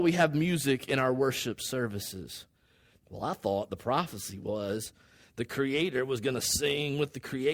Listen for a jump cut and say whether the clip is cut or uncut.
cut